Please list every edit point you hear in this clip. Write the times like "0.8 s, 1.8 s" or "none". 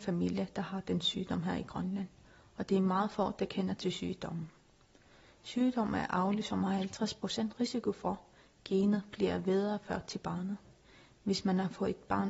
none

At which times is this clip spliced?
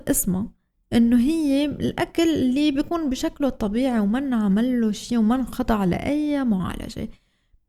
none

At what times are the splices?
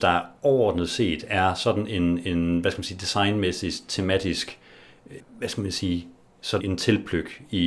5.2 s, 6.6 s

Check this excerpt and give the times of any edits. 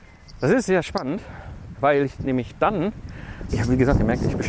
1.7 s, 3.5 s

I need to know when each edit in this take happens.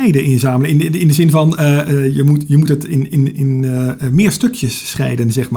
1.8 s

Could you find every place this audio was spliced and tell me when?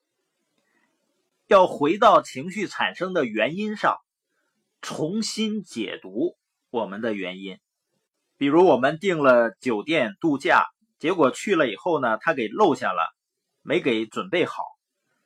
none

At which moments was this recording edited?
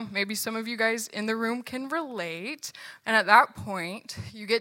3.0 s

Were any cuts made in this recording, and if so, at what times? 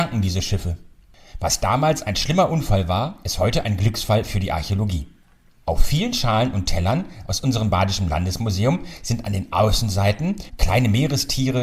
10.5 s

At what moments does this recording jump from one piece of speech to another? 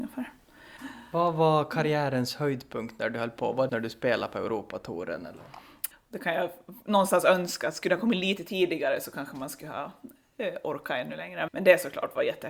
3.7 s, 5.9 s, 11.5 s

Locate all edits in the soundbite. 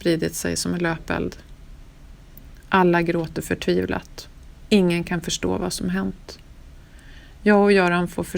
none

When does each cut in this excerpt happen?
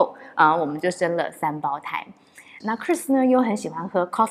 2.6 s

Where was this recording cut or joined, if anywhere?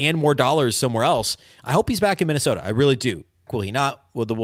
3.5 s

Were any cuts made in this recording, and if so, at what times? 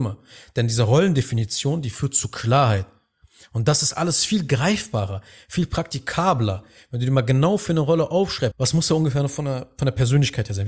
8.5 s

